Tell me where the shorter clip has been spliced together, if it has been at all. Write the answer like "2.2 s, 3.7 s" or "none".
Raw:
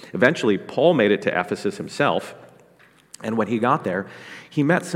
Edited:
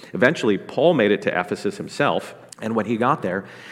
2.5 s